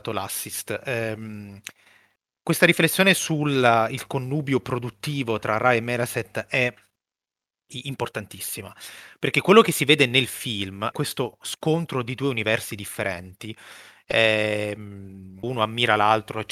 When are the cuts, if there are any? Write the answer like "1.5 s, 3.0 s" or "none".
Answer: 10.9 s, 15.4 s